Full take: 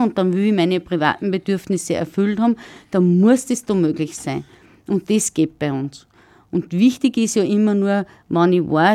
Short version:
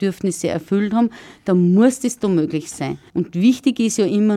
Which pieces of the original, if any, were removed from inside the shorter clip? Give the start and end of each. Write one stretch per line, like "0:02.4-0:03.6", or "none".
0:04.6-0:06.5